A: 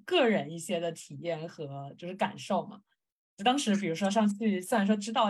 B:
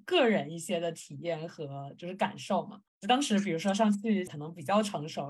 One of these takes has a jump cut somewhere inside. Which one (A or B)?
B